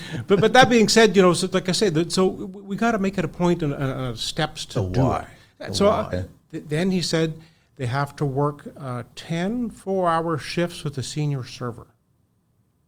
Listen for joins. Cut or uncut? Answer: cut